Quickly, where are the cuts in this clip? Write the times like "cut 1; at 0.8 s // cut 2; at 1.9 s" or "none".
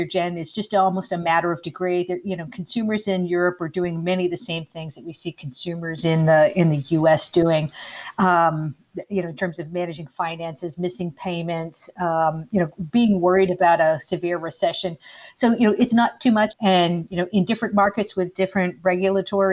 cut 1; at 16.5 s